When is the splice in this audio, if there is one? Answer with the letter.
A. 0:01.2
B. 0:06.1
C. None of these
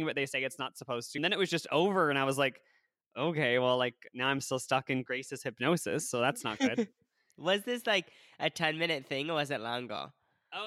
A